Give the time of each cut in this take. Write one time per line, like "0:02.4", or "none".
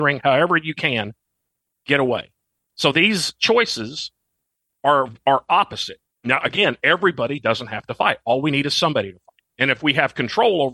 0:06.1
0:09.5